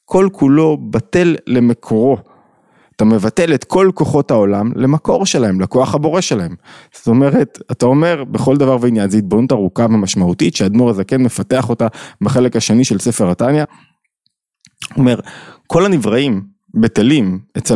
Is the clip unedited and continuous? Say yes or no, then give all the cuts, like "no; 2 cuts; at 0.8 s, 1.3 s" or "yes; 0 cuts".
yes; 0 cuts